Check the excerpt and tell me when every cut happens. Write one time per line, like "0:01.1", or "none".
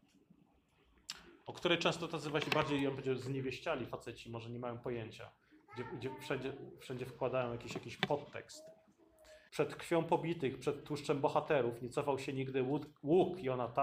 0:09.5